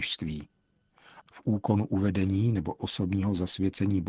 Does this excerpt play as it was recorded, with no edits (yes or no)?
no